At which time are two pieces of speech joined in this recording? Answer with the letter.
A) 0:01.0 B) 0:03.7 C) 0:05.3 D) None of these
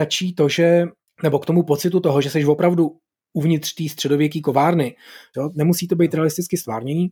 C